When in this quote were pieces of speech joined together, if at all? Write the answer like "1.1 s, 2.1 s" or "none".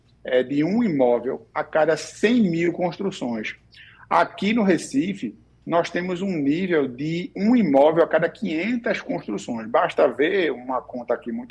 none